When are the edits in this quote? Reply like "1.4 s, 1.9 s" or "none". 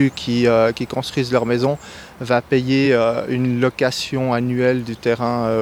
none